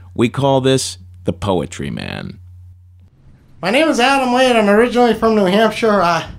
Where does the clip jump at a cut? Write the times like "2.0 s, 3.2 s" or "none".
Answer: none